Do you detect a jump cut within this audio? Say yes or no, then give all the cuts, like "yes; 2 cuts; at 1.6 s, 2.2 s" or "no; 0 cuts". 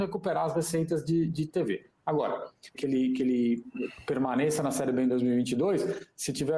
yes; 1 cut; at 2.7 s